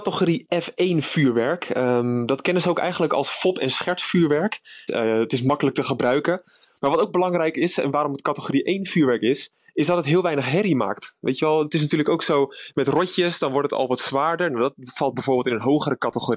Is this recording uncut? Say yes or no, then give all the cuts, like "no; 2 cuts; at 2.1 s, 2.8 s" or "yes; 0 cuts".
no; 1 cut; at 4.9 s